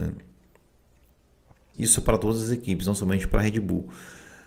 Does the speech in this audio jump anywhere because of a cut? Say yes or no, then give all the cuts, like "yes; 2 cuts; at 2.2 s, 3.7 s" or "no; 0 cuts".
yes; 1 cut; at 1.7 s